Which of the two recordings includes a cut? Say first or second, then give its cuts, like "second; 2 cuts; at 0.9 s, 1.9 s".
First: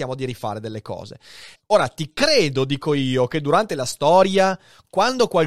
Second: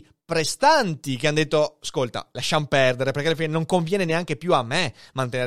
first; 1 cut; at 1.5 s